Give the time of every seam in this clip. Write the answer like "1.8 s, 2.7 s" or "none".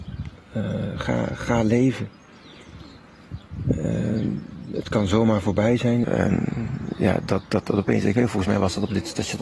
6.0 s